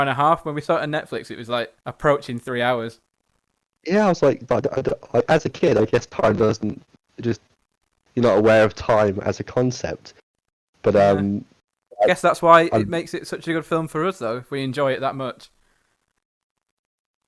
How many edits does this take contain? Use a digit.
2